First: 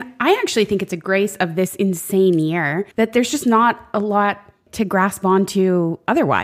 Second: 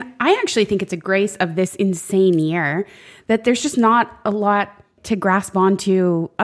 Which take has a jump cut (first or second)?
first